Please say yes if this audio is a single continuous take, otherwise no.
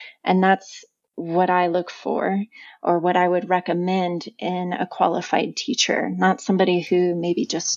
yes